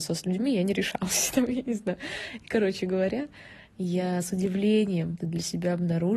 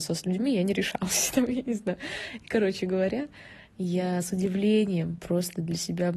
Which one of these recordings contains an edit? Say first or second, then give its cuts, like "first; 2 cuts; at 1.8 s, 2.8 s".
first; 1 cut; at 5.2 s